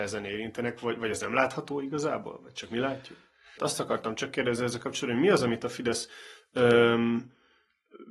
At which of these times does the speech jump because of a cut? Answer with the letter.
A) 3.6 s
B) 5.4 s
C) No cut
A